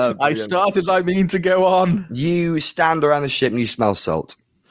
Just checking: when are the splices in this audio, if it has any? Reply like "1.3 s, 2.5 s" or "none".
none